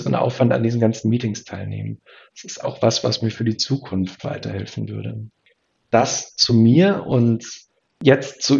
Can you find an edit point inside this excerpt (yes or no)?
yes